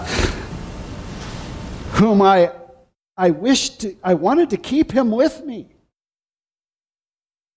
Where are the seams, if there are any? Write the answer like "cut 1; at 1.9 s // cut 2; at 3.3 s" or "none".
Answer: none